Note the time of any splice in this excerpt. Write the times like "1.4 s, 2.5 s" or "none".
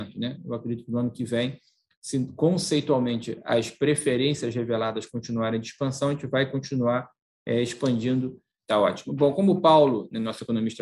8.6 s